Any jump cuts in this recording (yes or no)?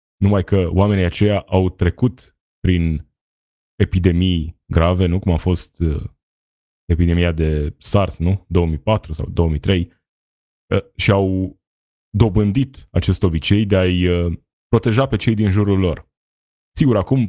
no